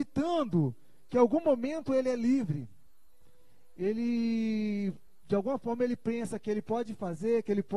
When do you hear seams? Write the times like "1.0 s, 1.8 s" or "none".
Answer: none